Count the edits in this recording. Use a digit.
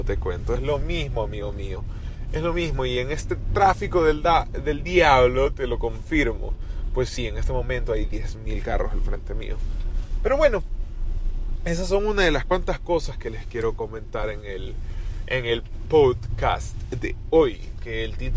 0